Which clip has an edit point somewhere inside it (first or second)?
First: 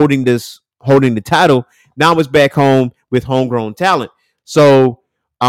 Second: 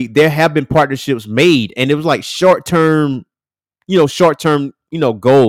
first